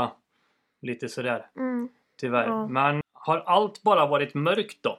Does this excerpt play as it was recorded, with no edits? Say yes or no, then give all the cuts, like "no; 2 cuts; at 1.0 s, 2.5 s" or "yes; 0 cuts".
no; 1 cut; at 3.0 s